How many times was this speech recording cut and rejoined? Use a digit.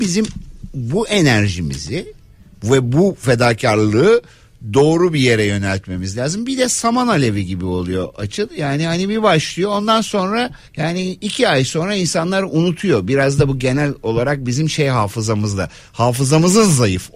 1